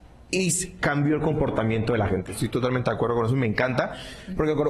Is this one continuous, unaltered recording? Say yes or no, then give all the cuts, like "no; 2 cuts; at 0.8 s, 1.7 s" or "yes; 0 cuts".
no; 1 cut; at 2.3 s